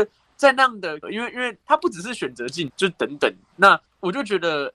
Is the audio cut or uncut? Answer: cut